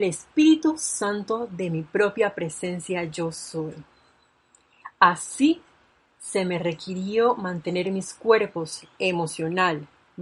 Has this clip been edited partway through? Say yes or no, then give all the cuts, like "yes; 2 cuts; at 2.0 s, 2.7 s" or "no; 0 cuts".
no; 0 cuts